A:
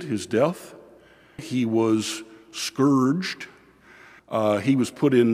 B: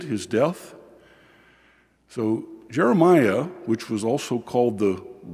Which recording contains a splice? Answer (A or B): A